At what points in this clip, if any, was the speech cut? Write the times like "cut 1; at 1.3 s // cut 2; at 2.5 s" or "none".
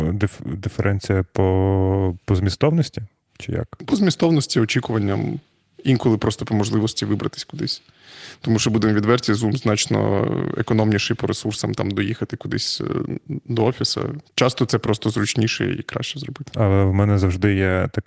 cut 1; at 16.5 s